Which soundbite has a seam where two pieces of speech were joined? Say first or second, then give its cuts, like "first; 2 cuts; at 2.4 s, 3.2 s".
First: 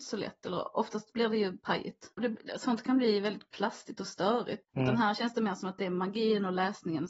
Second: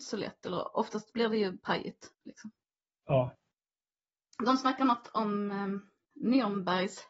first; 2 cuts; at 2.2 s, 4.6 s